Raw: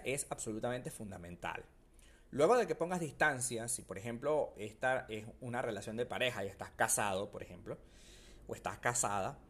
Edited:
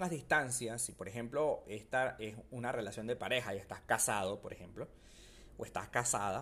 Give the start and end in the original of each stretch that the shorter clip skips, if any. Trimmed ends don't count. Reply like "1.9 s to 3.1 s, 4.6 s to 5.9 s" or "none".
none